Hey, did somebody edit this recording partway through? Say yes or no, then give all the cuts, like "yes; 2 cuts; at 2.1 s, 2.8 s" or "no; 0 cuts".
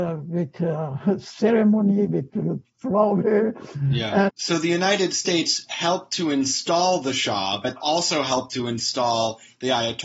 yes; 2 cuts; at 4.3 s, 7.8 s